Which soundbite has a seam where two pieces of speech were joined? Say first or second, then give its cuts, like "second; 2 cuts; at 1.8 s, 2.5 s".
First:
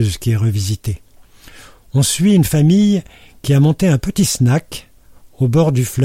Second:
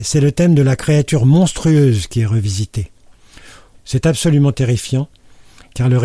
second; 1 cut; at 3.7 s